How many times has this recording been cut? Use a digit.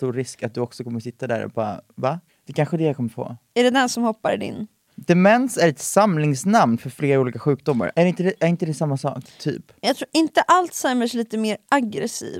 3